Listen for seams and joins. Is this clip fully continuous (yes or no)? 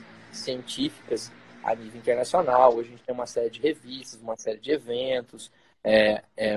yes